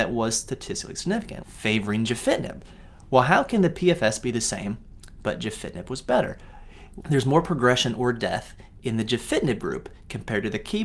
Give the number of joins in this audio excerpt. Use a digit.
2